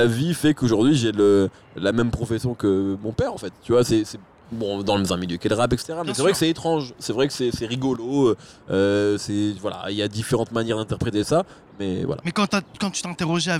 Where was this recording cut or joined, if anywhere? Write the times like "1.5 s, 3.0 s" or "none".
none